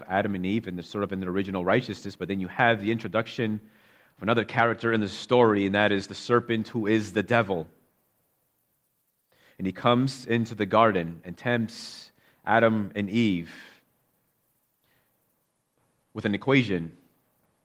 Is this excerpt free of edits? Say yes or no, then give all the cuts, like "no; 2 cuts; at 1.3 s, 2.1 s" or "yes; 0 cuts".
yes; 0 cuts